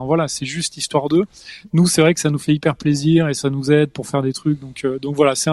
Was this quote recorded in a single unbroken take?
yes; 0 cuts

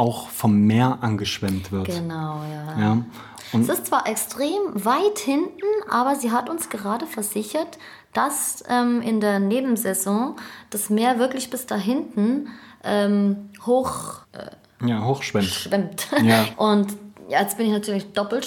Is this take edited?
yes; 2 cuts; at 14.2 s, 16.5 s

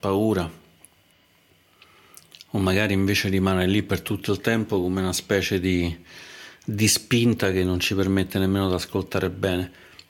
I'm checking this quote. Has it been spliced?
no; 0 cuts

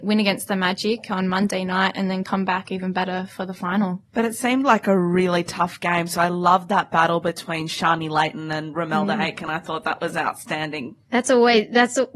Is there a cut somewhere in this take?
no; 0 cuts

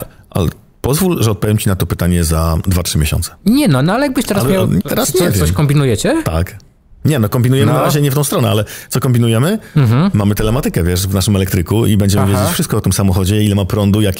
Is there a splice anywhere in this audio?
yes; 1 cut; at 4.8 s

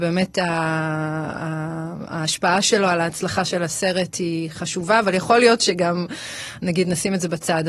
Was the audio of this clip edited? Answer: no; 0 cuts

